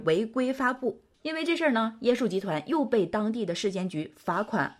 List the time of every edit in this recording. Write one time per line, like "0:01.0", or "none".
0:01.1